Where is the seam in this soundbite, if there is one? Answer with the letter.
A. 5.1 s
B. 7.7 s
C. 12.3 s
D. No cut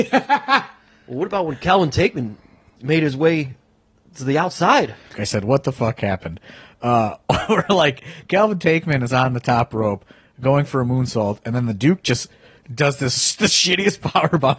A